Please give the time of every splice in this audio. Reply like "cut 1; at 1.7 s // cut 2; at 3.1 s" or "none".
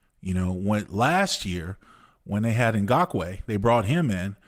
none